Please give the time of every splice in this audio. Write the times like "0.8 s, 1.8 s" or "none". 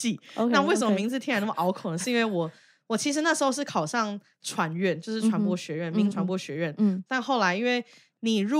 6.1 s